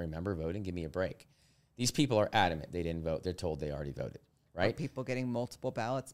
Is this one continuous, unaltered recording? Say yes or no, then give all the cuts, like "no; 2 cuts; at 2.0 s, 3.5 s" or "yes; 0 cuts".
yes; 0 cuts